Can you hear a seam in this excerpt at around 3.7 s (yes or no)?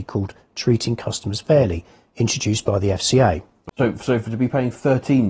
yes